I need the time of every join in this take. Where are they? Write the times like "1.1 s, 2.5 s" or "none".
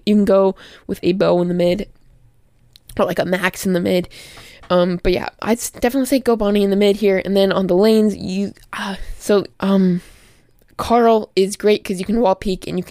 9.5 s